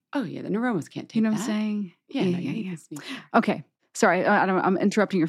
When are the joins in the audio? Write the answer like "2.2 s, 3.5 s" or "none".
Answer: none